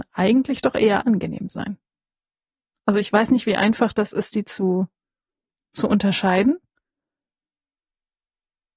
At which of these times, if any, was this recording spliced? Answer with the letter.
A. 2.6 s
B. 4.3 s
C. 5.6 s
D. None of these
D